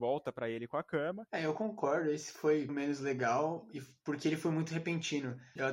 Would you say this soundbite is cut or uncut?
cut